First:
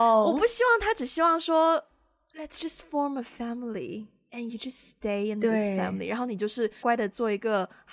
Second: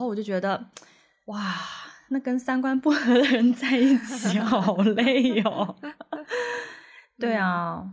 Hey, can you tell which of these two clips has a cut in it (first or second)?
first